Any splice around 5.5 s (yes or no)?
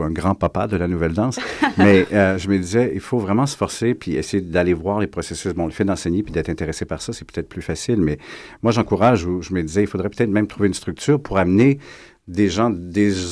no